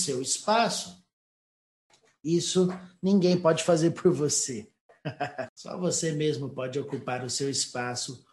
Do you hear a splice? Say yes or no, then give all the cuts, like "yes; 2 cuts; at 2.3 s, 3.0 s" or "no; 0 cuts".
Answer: yes; 1 cut; at 5.5 s